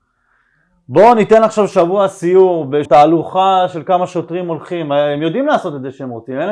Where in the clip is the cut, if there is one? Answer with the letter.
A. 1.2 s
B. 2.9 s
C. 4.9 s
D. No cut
B